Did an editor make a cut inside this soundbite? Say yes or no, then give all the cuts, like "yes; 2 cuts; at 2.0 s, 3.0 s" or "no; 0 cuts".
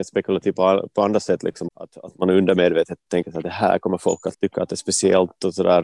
no; 0 cuts